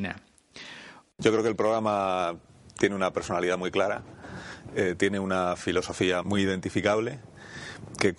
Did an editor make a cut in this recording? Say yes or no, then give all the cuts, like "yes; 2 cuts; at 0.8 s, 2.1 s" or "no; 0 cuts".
yes; 2 cuts; at 1.0 s, 6.2 s